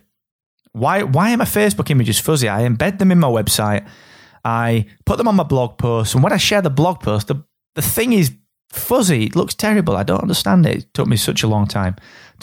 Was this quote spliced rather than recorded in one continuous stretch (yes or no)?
no